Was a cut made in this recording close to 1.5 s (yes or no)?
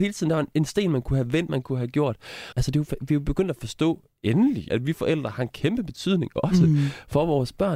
yes